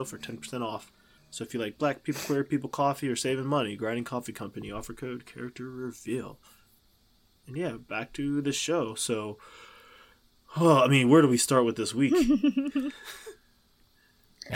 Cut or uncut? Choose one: cut